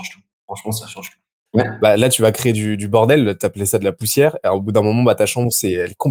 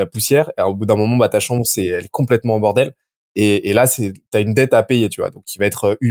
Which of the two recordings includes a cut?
first; 1 cut; at 1.5 s

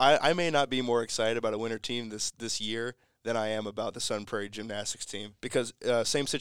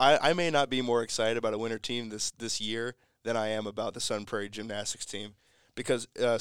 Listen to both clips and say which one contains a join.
first; 1 cut; at 5.4 s

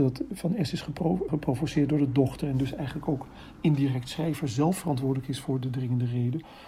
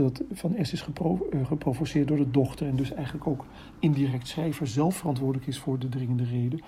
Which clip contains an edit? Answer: first; 1 cut; at 1.3 s

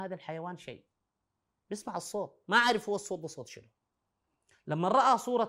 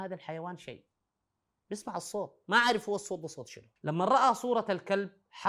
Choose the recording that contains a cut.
second; 1 cut; at 3.8 s

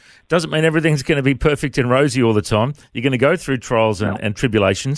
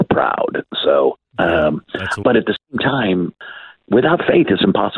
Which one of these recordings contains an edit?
second; 2 cuts; at 2.2 s, 3.8 s

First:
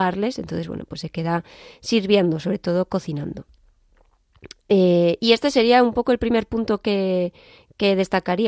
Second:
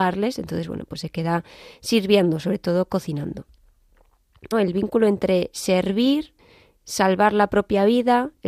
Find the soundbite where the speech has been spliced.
second; 1 cut; at 4.5 s

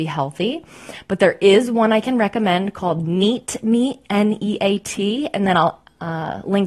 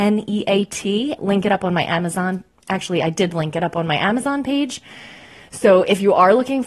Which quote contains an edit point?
second; 1 cut; at 1.2 s

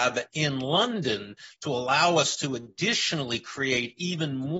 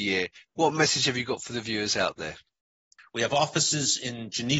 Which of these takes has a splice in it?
second; 1 cut; at 3.0 s

